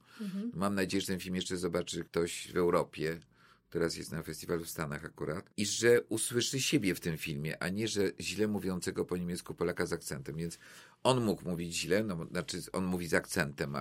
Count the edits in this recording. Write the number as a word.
zero